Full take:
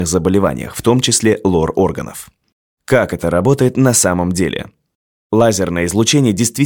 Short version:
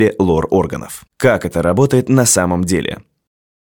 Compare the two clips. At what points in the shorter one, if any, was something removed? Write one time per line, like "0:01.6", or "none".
0:01.1

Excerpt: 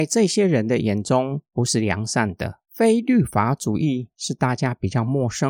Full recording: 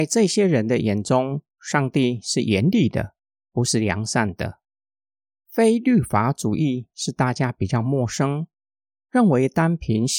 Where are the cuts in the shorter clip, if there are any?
0:01.5
0:02.6

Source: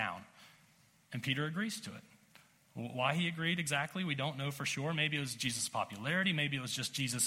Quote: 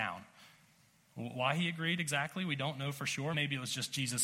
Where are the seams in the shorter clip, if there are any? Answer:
0:01.0
0:03.3

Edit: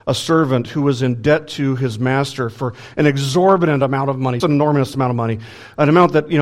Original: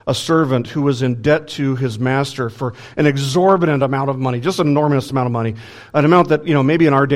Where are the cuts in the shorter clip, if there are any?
0:04.4

